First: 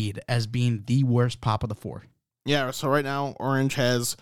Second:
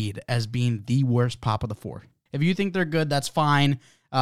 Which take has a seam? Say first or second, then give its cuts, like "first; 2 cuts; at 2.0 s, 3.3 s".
second; 1 cut; at 2.3 s